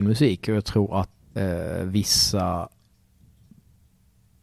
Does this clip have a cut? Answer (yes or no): yes